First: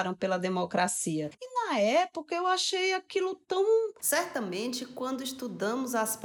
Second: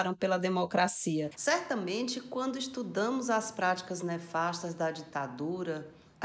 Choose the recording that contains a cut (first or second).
first